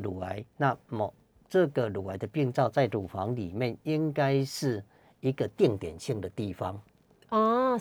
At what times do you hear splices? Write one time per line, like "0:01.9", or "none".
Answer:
none